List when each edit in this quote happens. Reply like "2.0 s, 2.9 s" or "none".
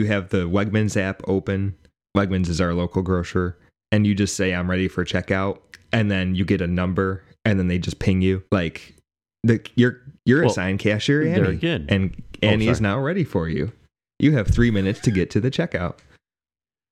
8.5 s, 10.2 s